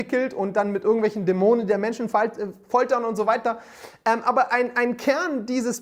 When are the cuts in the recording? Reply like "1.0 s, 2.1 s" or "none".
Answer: none